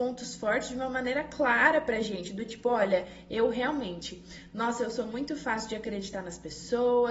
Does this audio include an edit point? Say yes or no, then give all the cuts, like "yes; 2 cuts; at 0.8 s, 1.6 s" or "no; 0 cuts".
no; 0 cuts